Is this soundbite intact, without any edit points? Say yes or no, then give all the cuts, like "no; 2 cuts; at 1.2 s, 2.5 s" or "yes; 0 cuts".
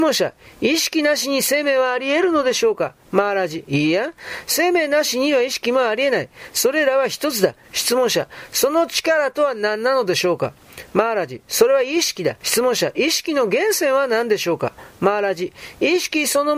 no; 2 cuts; at 7.6 s, 12.4 s